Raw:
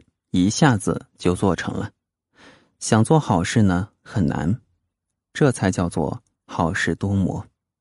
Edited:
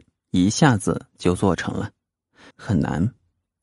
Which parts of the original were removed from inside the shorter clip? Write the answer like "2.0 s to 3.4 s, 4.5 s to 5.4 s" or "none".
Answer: 2.5 s to 4.0 s

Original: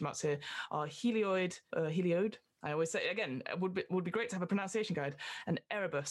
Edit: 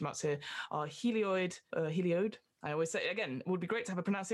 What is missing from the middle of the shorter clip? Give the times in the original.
3.4 s to 3.9 s

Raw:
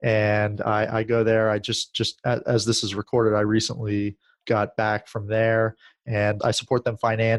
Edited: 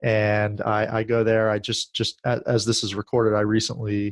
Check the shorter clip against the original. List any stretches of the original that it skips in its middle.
none

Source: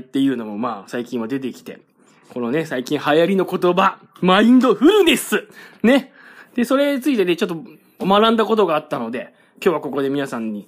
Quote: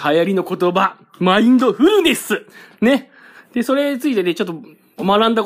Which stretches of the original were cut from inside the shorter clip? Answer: none

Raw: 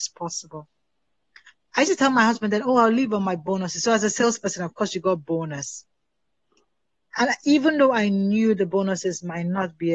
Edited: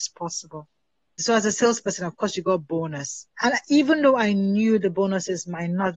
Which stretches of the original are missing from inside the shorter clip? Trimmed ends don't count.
1.2 s to 3.8 s, 5.9 s to 7.1 s

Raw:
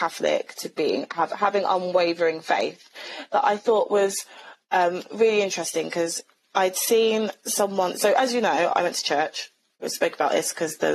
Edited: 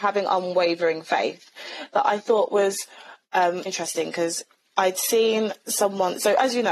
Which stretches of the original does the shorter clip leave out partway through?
5.0 s to 5.4 s

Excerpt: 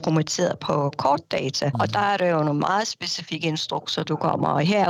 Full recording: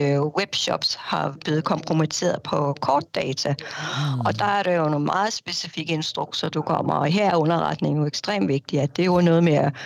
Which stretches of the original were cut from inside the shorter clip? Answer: 3.6 s to 4.2 s

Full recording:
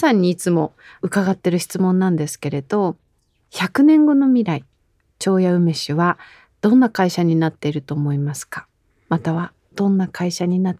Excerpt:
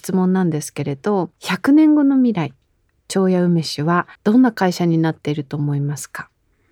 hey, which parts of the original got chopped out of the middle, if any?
3.0 s to 3.4 s, 6.3 s to 6.5 s

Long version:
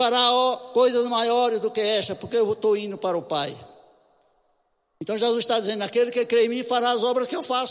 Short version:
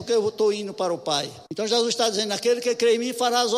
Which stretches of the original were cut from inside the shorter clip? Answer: 3.7 s to 5.0 s

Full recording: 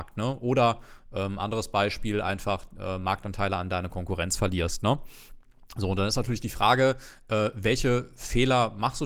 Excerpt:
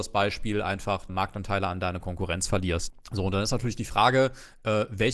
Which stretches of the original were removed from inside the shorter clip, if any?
2.7 s to 3.0 s, 4.8 s to 5.5 s

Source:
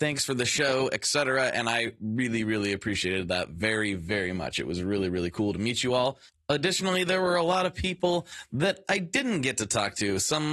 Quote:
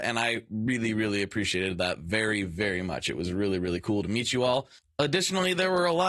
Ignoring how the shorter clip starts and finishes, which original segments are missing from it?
none

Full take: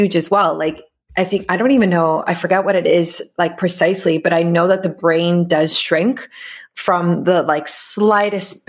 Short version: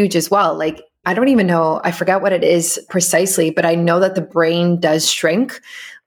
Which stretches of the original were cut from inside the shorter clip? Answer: 1.0 s to 1.5 s, 3.3 s to 3.6 s

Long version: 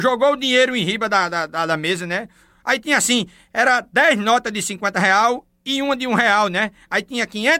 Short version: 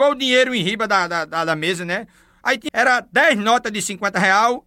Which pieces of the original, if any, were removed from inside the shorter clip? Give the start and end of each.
2.9 s to 3.5 s

